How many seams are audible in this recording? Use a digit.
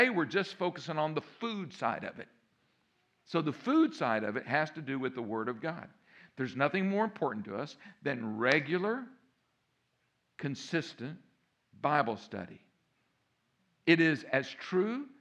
0